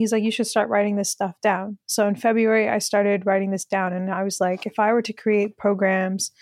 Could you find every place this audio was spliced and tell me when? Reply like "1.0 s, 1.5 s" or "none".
none

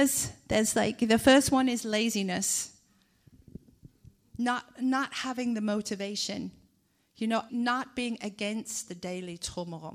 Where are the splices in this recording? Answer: 7.5 s

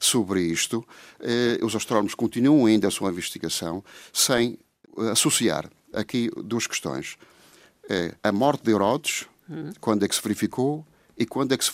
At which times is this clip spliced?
8.2 s

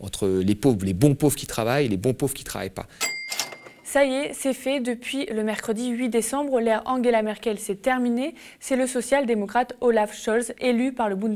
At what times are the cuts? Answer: none

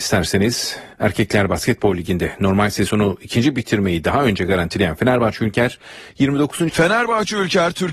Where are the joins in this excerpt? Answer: 0.9 s, 6.7 s

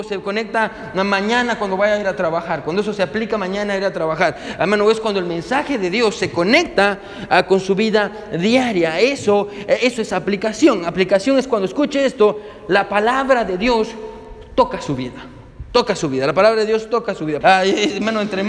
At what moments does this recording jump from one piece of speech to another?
17.4 s

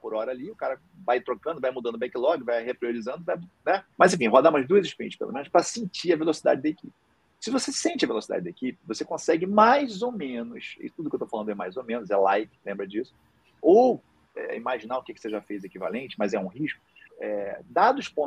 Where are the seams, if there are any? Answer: 4.0 s, 13.6 s, 17.1 s

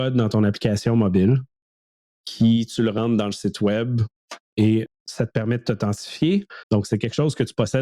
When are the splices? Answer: 4.9 s, 6.6 s

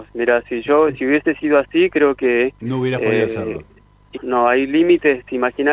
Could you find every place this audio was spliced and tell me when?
4.2 s

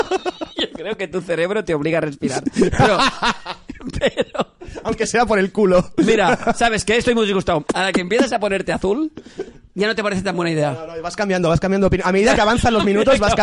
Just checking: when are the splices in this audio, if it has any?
7.7 s

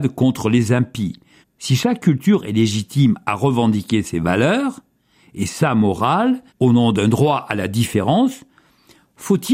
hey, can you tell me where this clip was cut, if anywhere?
1.4 s, 6.5 s

